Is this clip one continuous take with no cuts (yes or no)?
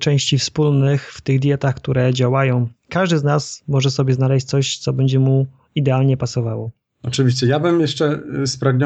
yes